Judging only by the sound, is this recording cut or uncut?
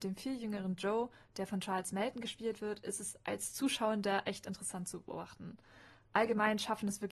uncut